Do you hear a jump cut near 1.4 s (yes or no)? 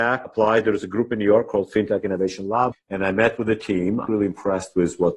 no